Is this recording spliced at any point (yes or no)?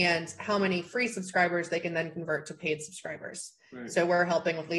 no